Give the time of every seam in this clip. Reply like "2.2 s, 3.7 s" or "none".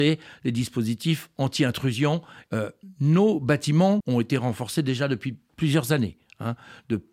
2.5 s, 4.0 s